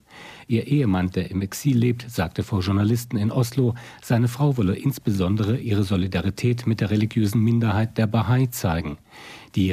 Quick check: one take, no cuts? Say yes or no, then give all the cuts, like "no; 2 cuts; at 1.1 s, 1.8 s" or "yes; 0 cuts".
yes; 0 cuts